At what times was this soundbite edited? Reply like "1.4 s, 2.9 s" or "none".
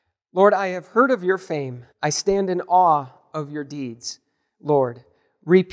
1.9 s